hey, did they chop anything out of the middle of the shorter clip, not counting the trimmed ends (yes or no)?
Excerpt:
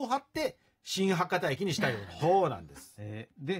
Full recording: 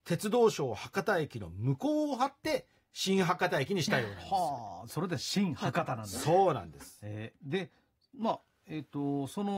yes